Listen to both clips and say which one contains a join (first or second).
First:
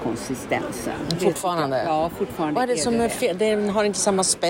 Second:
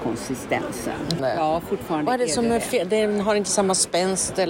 second